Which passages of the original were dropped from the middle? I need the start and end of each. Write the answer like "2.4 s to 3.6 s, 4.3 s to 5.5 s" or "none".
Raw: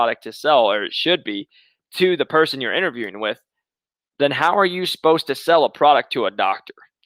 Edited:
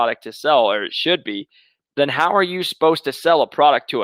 1.9 s to 4.1 s

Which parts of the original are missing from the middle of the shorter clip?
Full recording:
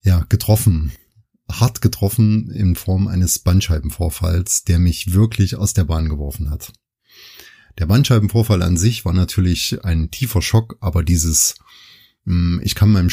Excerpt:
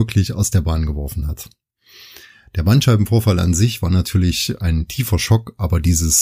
none

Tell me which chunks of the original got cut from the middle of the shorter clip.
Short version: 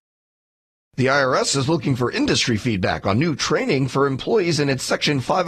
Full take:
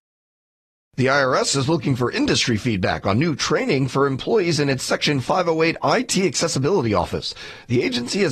none

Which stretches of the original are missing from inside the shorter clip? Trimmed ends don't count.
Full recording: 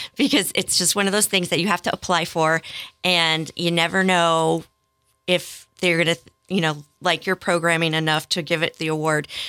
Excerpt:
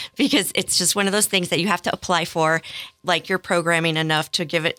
3.0 s to 6.9 s

